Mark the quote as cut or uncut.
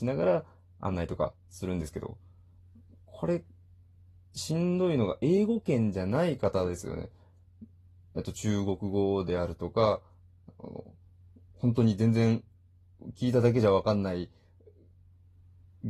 uncut